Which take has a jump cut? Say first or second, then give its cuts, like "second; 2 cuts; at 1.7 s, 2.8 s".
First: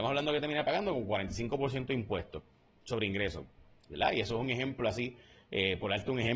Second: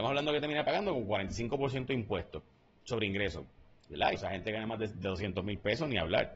second; 1 cut; at 4.1 s